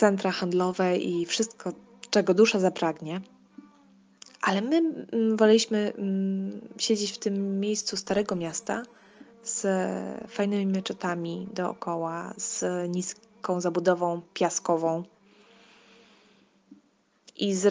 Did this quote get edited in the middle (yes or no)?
no